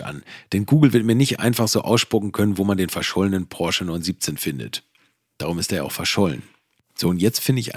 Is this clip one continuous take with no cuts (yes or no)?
yes